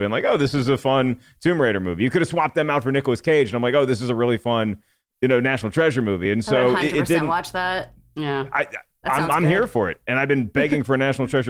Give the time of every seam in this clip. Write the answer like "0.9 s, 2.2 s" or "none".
none